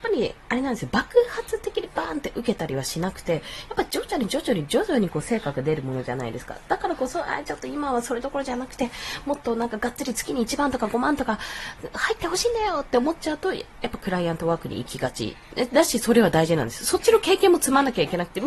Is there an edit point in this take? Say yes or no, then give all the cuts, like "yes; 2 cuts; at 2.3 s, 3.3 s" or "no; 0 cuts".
no; 0 cuts